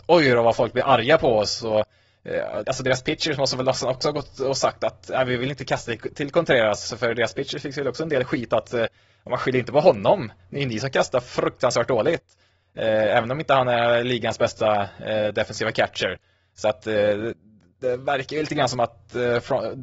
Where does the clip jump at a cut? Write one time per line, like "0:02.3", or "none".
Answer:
0:02.6